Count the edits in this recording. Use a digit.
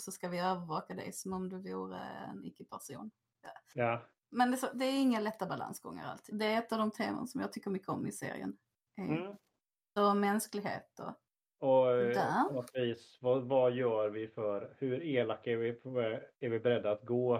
2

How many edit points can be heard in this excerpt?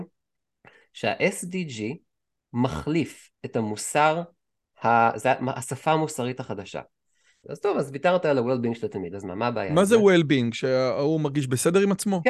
1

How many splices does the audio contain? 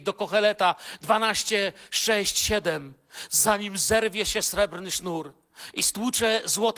0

